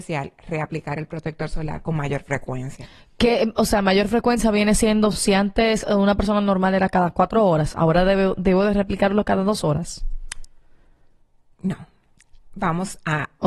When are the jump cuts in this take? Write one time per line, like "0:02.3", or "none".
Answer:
none